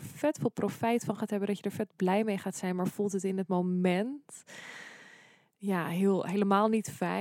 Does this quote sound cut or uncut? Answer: uncut